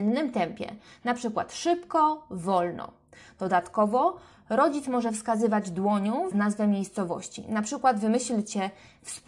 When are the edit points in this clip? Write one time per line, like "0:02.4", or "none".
0:06.3